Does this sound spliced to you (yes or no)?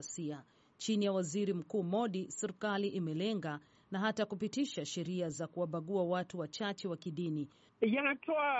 yes